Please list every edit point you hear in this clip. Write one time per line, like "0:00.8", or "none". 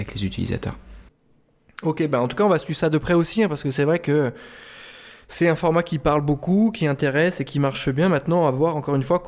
none